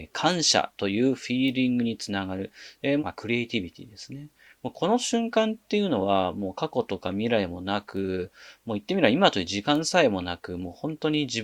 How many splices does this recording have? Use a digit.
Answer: 2